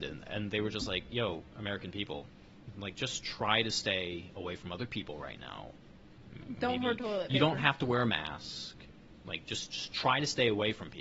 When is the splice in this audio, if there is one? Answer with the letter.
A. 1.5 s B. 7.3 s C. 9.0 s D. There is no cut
D